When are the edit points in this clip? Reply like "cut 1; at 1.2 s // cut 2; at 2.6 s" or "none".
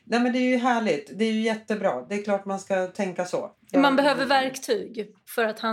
none